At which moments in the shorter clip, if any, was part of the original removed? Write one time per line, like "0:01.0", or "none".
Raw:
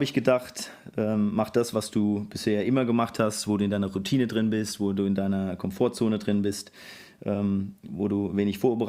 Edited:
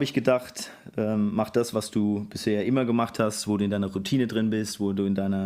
none